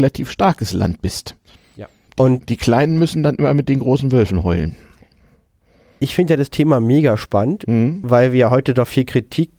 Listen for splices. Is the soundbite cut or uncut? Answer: cut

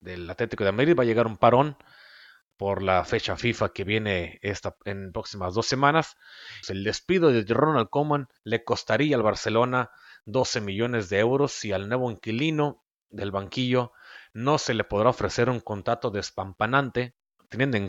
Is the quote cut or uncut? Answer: cut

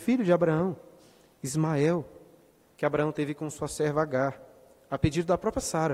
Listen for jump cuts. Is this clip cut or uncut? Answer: uncut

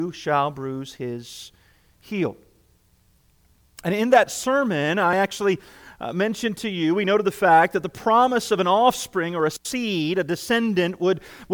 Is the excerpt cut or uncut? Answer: uncut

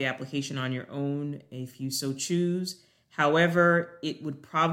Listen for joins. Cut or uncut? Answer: uncut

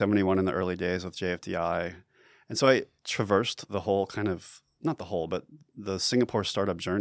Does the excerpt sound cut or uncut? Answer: cut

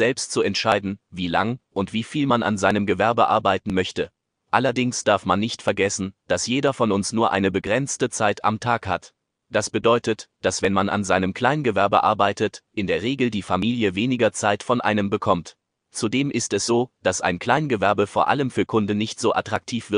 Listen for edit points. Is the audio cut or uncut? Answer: uncut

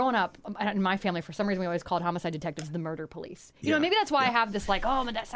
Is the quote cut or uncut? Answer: uncut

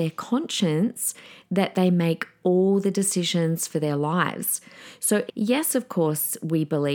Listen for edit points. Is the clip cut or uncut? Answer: cut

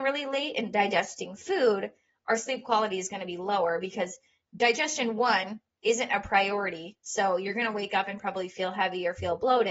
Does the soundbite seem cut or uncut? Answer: uncut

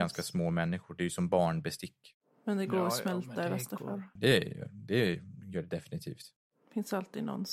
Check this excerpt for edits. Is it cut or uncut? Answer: cut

